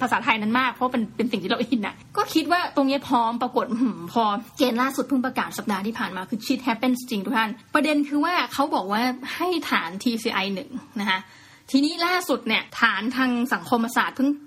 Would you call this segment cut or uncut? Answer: cut